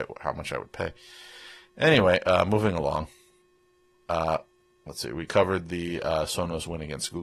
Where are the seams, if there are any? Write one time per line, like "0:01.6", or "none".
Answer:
none